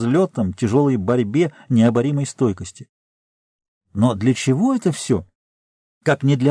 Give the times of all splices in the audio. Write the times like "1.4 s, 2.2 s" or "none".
none